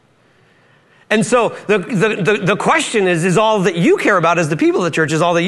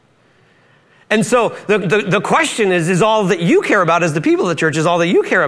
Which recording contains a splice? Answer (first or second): second